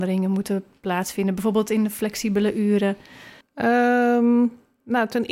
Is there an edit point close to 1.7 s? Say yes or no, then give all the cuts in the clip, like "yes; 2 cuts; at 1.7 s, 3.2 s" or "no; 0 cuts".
no; 1 cut; at 3.4 s